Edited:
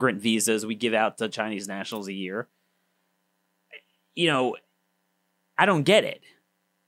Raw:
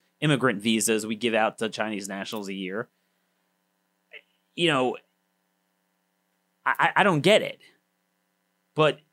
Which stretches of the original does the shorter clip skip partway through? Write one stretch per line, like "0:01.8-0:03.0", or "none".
0:06.0-0:06.9